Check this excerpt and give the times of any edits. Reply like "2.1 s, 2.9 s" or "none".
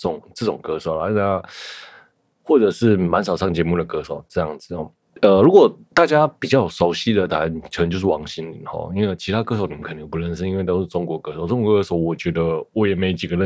none